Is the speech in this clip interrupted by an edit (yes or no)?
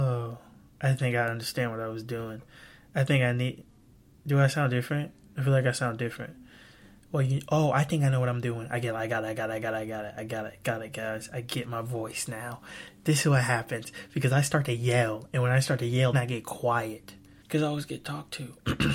yes